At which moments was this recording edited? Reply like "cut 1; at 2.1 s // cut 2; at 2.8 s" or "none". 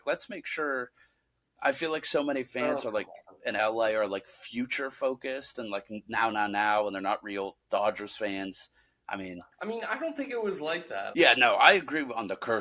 cut 1; at 9.5 s // cut 2; at 11.1 s

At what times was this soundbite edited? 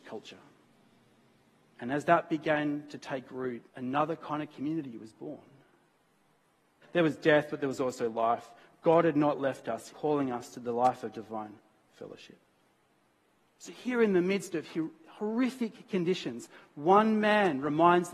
cut 1; at 3.7 s // cut 2; at 6.8 s // cut 3; at 9.9 s

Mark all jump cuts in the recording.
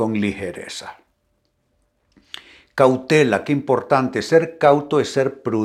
none

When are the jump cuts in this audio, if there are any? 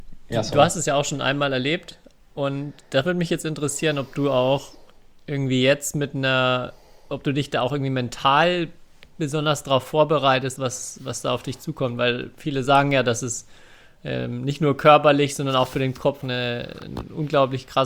cut 1; at 10.6 s // cut 2; at 16.2 s

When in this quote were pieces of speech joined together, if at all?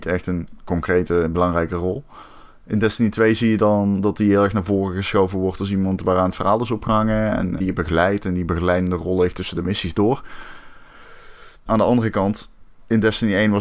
cut 1; at 7.6 s // cut 2; at 11.7 s

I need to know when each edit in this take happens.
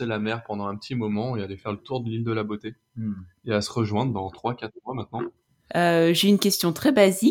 cut 1; at 5.7 s

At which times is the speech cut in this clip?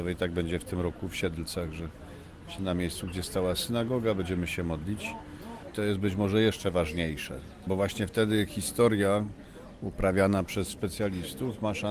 cut 1; at 5.7 s

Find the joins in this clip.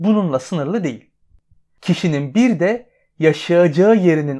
none

